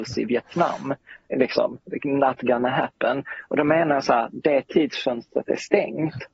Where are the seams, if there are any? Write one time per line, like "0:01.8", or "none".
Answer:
none